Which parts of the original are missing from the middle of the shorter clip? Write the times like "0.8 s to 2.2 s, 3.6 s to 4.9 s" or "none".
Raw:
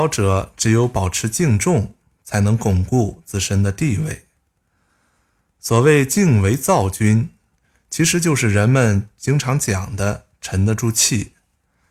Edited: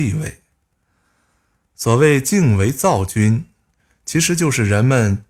none